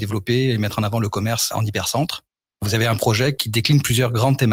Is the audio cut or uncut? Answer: uncut